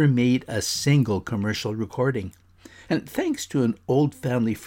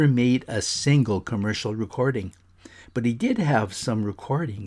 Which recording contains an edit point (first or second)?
first